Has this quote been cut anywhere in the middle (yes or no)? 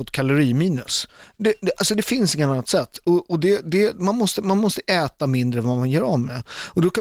no